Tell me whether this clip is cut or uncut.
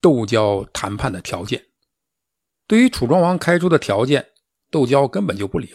cut